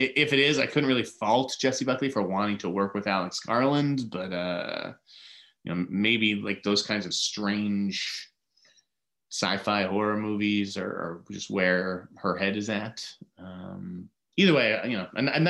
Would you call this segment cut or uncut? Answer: uncut